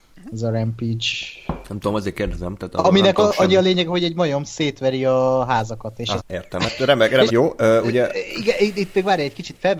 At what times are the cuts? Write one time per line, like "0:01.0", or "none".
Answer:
0:06.2
0:07.3